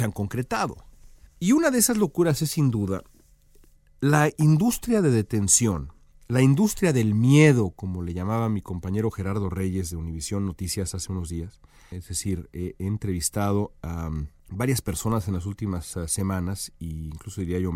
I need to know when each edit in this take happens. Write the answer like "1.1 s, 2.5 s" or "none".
1.3 s, 11.9 s